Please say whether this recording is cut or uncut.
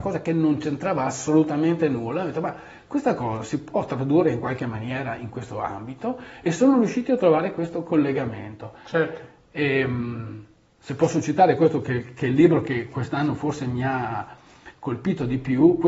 uncut